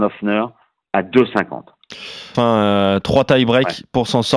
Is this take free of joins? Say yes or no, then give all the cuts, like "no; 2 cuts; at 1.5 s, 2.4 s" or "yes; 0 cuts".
no; 1 cut; at 2.3 s